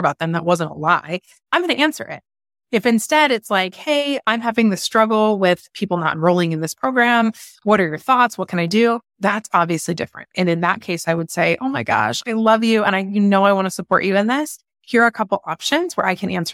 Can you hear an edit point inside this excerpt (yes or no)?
no